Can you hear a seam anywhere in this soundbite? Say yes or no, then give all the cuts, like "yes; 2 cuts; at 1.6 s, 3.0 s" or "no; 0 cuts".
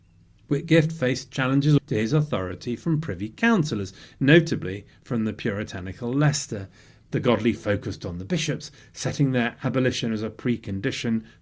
yes; 2 cuts; at 1.8 s, 7.0 s